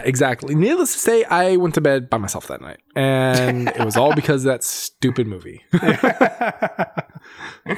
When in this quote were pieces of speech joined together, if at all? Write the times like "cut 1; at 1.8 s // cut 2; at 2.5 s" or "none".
none